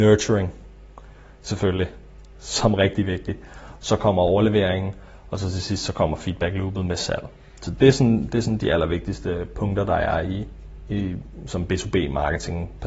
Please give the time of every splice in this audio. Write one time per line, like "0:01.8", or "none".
none